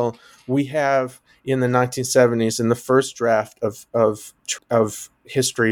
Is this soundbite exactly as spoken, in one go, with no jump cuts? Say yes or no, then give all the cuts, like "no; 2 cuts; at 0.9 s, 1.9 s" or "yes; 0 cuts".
no; 1 cut; at 4.6 s